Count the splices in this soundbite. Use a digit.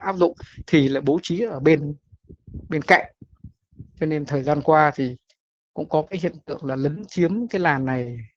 0